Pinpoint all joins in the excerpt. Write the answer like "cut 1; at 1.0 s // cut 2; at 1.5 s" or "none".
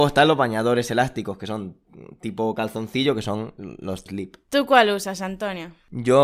cut 1; at 4.1 s